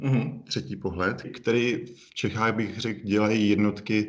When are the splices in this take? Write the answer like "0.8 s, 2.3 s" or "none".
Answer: 1.2 s